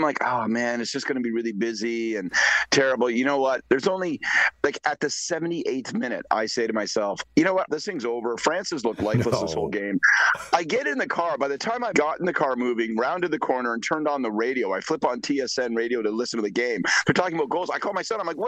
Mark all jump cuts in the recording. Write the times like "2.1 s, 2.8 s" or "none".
7.7 s, 11.9 s